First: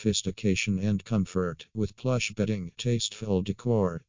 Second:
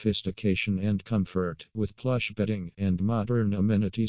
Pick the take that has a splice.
second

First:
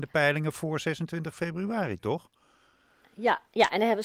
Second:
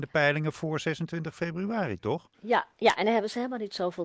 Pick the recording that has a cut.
second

